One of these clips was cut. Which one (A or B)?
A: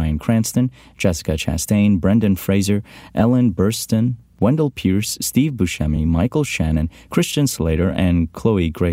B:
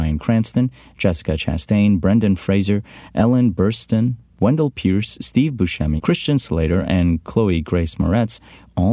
B